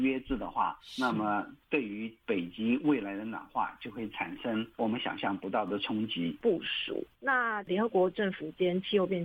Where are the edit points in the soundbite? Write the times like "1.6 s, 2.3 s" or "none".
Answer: 6.4 s